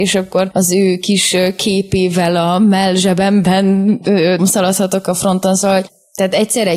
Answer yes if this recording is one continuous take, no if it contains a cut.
no